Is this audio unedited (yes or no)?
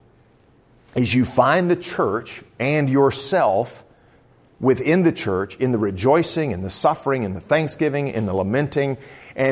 yes